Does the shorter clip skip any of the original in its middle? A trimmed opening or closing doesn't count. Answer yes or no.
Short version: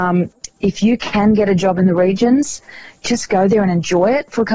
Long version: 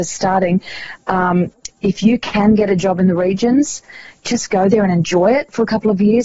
no